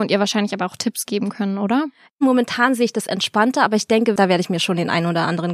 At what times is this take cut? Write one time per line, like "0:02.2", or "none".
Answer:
0:04.2